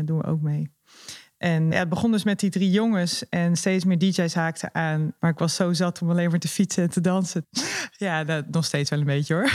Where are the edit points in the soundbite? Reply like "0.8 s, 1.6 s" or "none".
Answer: 1.7 s, 5.2 s, 7.4 s

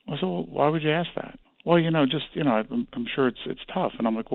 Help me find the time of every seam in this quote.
none

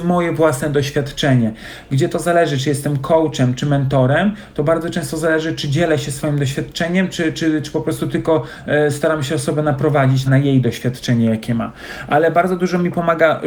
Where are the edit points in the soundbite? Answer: 10.3 s

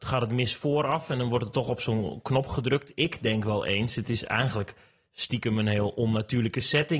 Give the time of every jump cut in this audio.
none

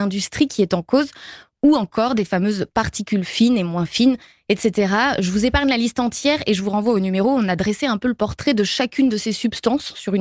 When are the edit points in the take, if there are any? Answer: none

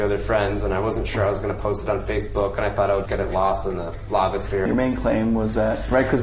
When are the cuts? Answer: 3.1 s, 4.7 s

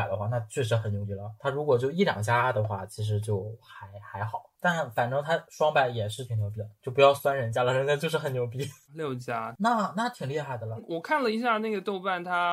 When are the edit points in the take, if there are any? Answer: none

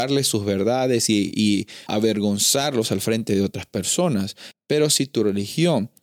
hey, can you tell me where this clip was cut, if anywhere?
1.9 s, 4.5 s

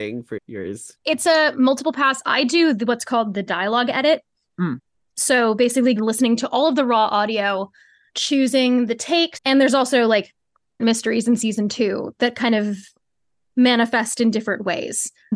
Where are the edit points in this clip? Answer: 6.0 s, 8.1 s, 9.3 s

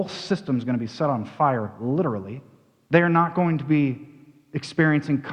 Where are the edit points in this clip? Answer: 2.9 s

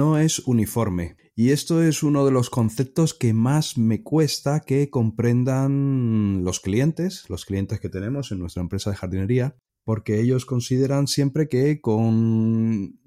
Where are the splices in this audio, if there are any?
9.7 s

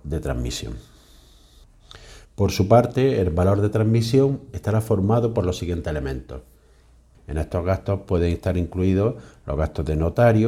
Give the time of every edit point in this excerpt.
2.3 s, 7.1 s

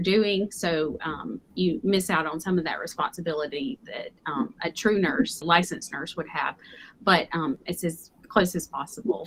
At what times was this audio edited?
5.4 s

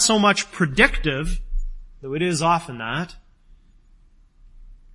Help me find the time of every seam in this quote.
none

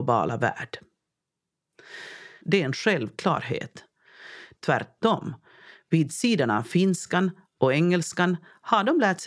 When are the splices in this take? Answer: 2.4 s, 4.6 s

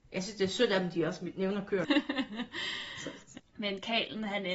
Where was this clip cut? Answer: 1.8 s, 3.4 s

